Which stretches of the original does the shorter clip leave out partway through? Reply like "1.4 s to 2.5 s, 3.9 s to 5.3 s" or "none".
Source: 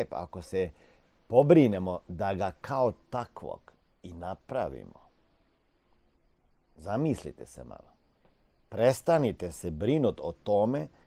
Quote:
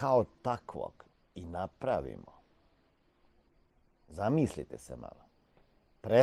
none